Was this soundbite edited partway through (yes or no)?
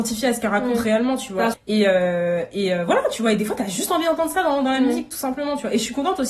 yes